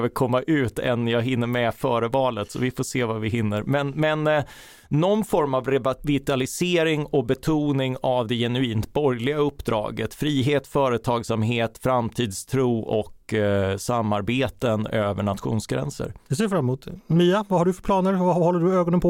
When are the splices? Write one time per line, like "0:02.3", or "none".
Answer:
none